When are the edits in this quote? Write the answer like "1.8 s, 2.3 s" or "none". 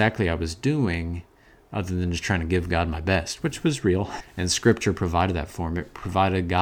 4.2 s